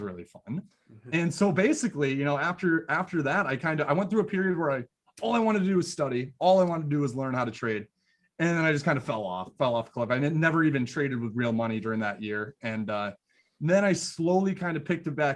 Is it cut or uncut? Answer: uncut